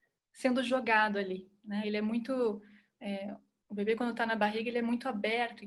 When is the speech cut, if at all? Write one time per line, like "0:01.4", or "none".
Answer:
none